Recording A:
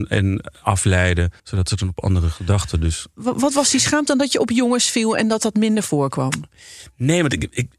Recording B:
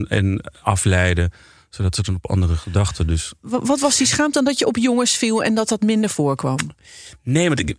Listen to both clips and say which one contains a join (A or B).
A